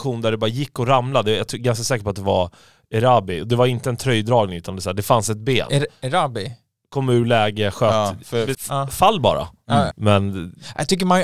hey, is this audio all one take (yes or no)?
no